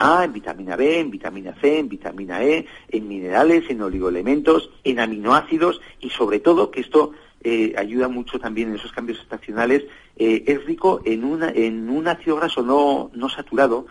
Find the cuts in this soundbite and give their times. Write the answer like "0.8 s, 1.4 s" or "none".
4.8 s

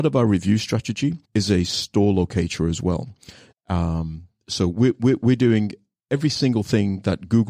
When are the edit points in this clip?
1.2 s, 3.5 s

